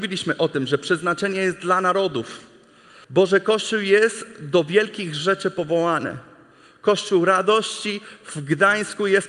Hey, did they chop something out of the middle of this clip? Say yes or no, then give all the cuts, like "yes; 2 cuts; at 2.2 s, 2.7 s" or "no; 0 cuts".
yes; 1 cut; at 3.0 s